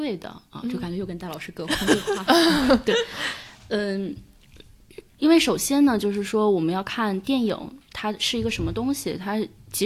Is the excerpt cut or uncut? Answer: uncut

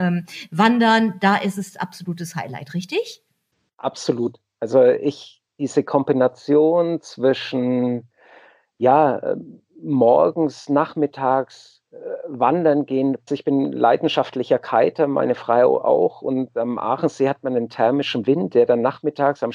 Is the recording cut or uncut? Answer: cut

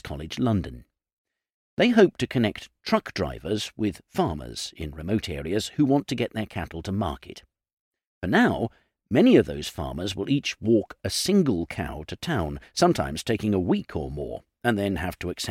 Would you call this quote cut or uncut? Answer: uncut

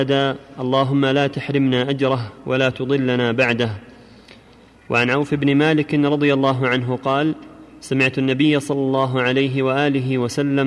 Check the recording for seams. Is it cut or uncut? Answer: uncut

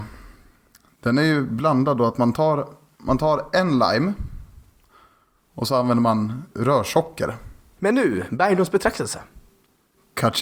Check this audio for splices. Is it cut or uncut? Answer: cut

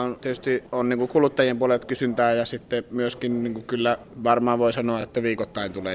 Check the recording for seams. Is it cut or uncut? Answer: uncut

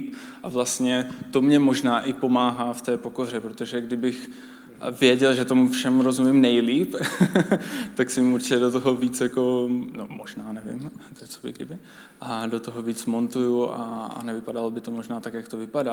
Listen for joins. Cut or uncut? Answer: uncut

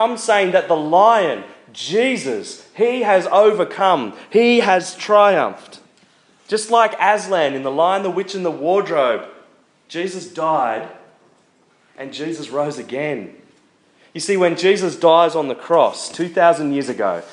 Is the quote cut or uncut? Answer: uncut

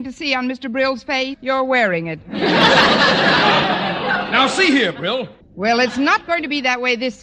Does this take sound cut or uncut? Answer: cut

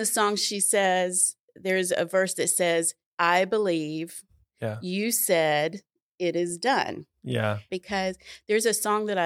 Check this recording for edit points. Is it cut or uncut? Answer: cut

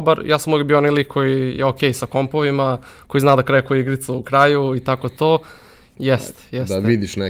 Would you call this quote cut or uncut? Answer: cut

